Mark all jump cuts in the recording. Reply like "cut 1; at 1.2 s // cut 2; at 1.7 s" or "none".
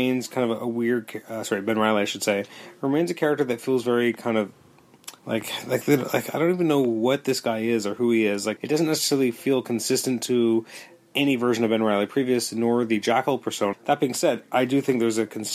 cut 1; at 5.2 s // cut 2; at 8.6 s // cut 3; at 13.7 s